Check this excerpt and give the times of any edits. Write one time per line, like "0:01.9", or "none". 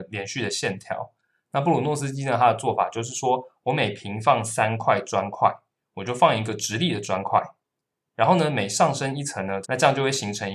0:09.6